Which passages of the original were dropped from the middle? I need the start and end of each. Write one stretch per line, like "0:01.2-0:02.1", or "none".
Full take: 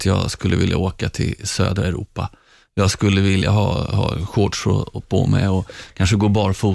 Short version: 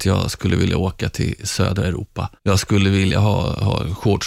0:02.4-0:02.7